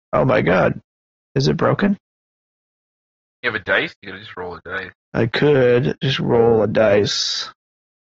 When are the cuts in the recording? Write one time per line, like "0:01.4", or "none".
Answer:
none